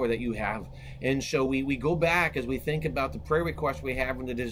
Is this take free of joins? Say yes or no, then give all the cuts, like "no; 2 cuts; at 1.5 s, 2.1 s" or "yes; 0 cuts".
yes; 0 cuts